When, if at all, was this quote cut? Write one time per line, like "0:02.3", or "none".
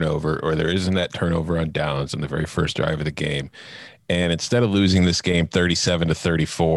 none

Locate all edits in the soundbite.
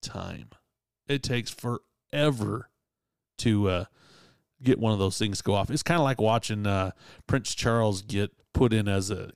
0:08.4

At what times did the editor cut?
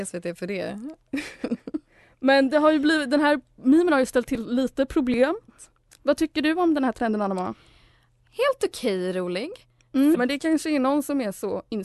0:05.5
0:10.1

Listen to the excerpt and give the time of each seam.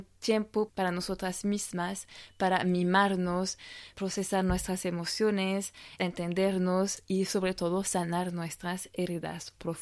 0:03.9
0:06.0

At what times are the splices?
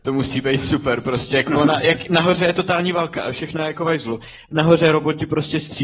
none

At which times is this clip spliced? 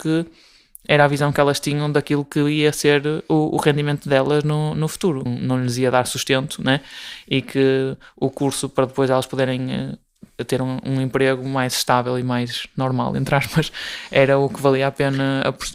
0:05.3

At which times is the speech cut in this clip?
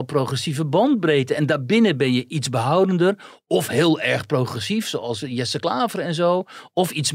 none

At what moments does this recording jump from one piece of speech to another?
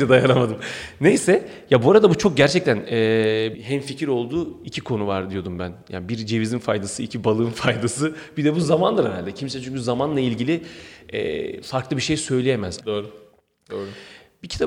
0:03.5
0:12.8

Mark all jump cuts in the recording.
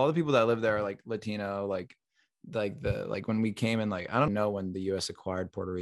0:04.3

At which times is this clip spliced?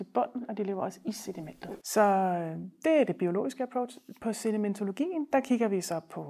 0:01.8

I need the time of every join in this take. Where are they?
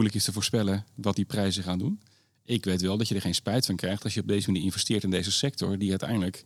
none

